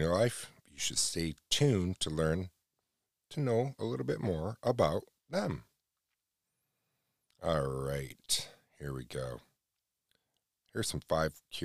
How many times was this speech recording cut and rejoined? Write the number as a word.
zero